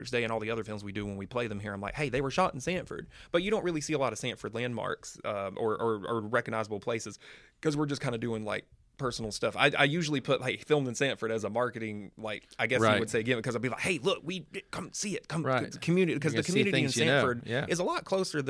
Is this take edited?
no; 0 cuts

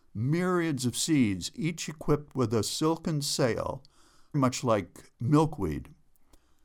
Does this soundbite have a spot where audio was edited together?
yes; 1 cut; at 4.3 s

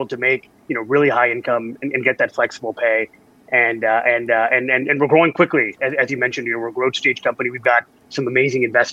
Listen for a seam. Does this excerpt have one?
no; 0 cuts

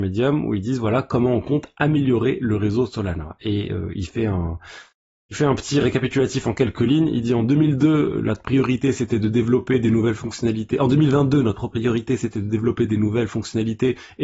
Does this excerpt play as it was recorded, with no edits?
yes; 0 cuts

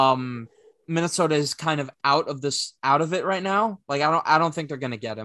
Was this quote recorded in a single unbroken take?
yes; 0 cuts

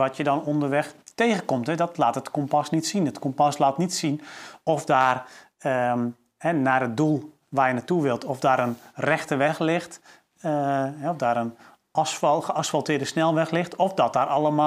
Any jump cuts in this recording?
no; 0 cuts

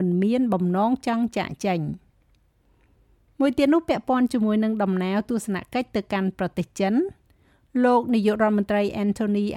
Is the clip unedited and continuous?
yes; 0 cuts

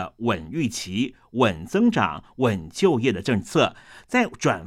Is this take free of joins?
yes; 0 cuts

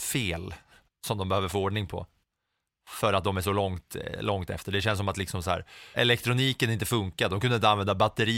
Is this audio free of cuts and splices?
no; 1 cut; at 5.9 s

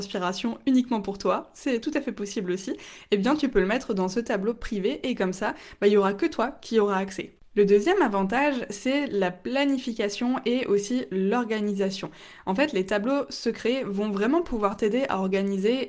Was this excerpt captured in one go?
yes; 0 cuts

